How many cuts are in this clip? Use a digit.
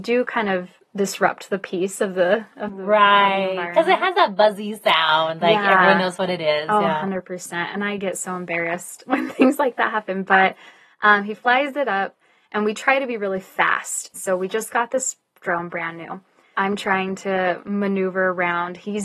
3